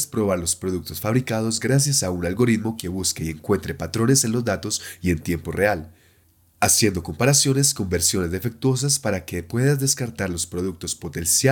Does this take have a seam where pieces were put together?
no; 0 cuts

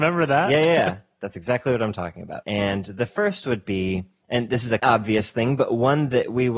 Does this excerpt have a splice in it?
yes; 2 cuts; at 2.4 s, 4.8 s

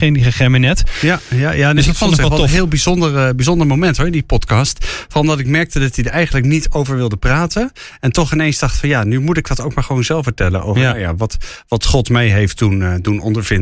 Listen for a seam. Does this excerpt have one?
no; 0 cuts

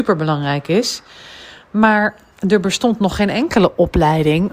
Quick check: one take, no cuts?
yes; 0 cuts

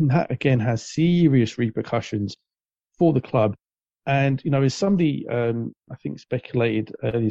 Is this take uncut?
yes; 0 cuts

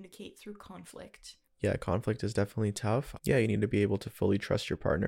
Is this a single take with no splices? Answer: no; 1 cut; at 3.2 s

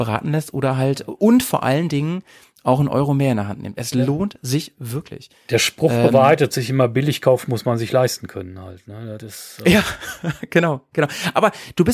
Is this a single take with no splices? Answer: yes; 0 cuts

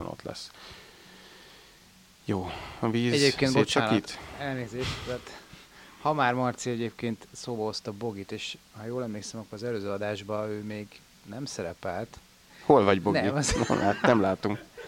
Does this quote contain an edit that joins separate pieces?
yes; 1 cut; at 12.5 s

